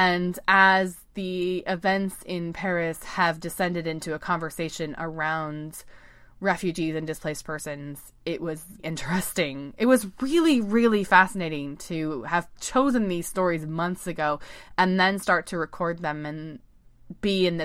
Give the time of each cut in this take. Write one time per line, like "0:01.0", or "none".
0:08.8